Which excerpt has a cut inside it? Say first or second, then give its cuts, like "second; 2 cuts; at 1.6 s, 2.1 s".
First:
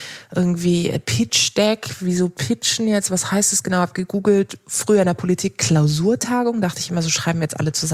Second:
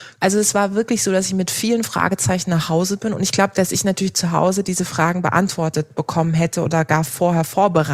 second; 1 cut; at 3.5 s